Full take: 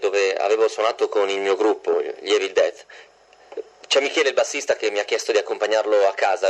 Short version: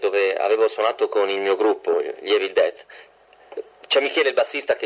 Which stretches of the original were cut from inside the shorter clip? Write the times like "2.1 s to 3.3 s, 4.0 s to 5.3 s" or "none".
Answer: none